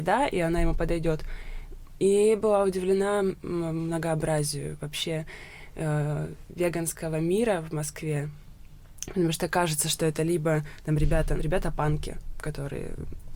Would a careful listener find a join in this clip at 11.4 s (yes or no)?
yes